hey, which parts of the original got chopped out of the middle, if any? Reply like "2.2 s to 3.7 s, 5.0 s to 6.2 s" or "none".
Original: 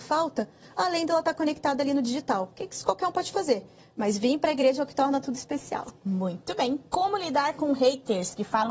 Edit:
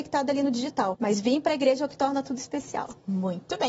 2.5 s to 3.9 s